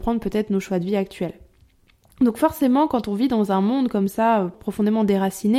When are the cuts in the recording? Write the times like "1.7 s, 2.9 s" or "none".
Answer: 4.5 s